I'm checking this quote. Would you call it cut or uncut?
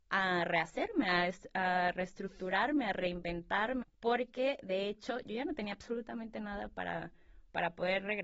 cut